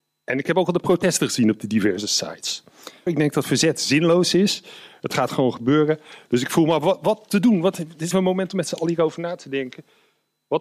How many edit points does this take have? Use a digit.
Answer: 2